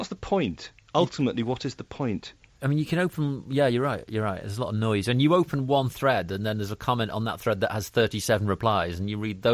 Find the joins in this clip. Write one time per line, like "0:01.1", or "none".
none